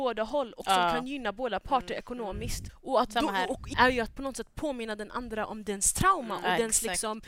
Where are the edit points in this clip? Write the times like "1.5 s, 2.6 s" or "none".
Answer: 2.7 s, 3.7 s